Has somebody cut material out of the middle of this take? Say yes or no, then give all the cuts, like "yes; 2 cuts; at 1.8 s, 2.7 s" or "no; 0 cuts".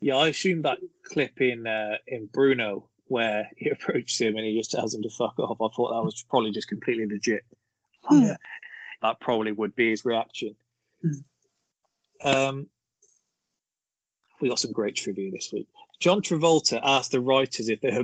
yes; 1 cut; at 9.0 s